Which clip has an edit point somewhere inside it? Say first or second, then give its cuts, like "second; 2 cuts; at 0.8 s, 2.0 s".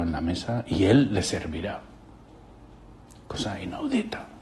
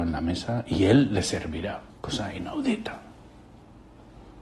second; 1 cut; at 1.9 s